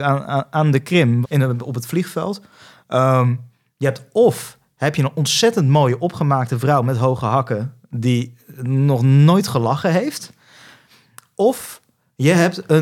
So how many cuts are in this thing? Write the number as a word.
one